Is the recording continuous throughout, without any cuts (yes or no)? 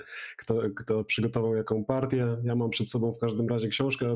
yes